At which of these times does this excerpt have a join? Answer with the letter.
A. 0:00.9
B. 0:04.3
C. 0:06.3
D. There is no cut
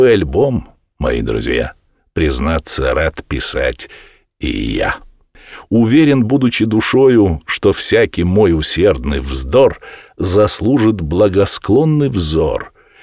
D